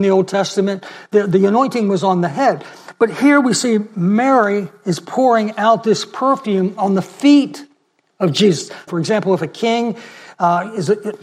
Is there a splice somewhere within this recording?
yes; 1 cut; at 8.9 s

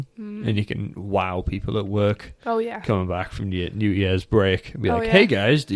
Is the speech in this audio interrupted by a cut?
no; 0 cuts

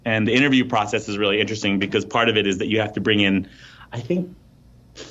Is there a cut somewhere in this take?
no; 0 cuts

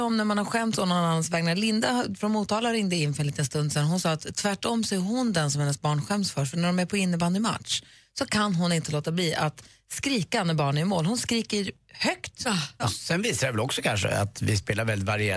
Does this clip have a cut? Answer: yes; 1 cut; at 12.8 s

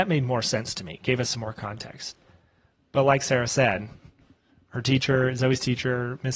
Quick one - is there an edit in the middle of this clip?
no; 0 cuts

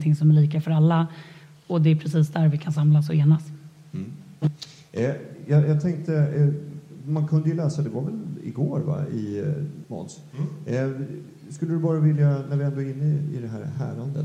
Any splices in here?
yes; 1 cut; at 9.8 s

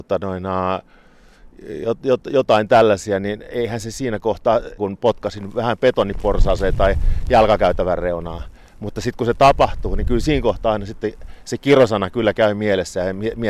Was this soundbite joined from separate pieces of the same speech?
yes; 1 cut; at 4.8 s

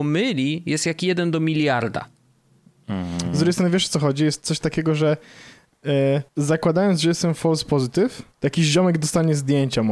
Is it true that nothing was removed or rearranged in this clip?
no; 2 cuts; at 6.3 s, 8.3 s

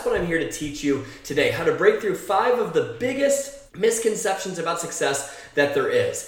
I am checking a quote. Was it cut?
yes; 1 cut; at 3.7 s

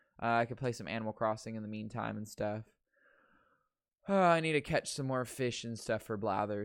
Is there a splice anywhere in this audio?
no; 0 cuts

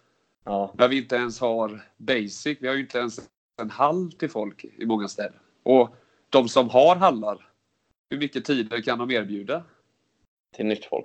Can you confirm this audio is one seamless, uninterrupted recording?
yes; 0 cuts

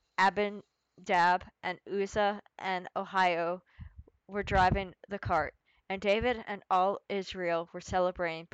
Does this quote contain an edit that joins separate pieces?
no; 0 cuts

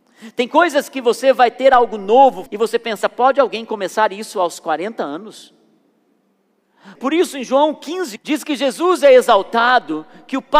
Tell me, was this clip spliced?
yes; 3 cuts; at 2.5 s, 6.9 s, 8.2 s

